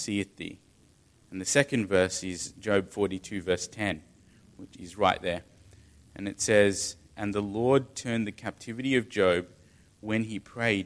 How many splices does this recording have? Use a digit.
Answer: 1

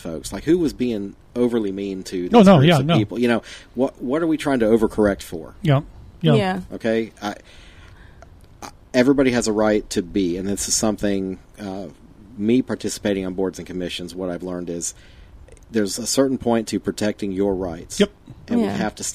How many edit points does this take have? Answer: 0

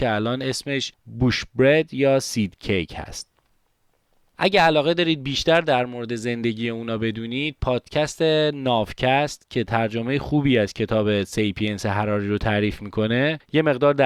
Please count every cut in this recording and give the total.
0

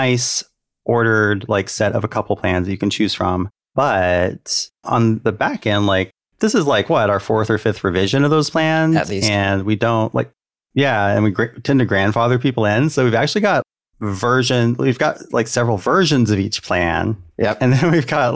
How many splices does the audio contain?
0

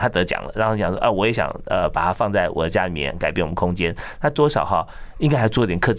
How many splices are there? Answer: 0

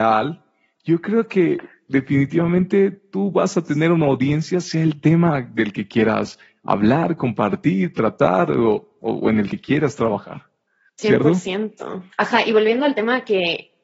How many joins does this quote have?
1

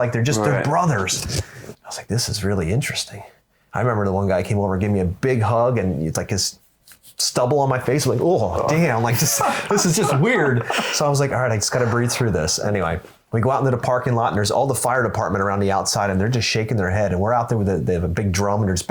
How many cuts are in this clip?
1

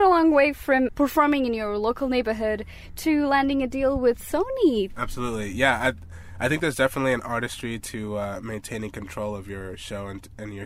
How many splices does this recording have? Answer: 1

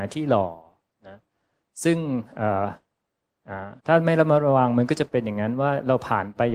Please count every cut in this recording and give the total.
1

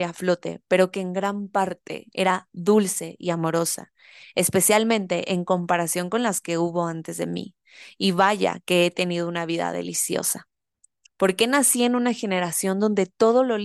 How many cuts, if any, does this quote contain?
1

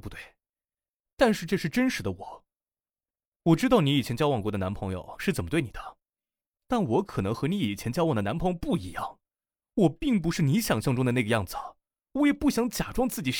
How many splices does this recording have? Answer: 0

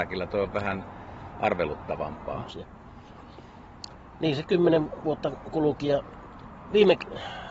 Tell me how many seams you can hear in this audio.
1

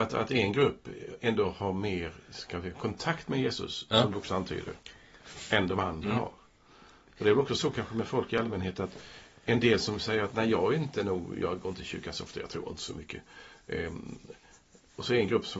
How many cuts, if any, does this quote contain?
0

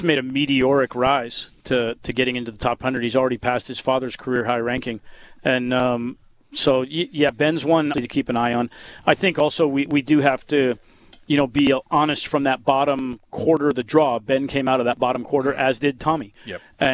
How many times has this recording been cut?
1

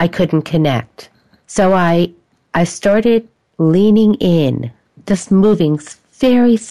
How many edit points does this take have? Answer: 0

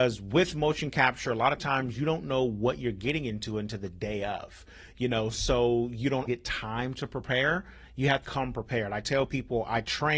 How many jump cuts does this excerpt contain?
2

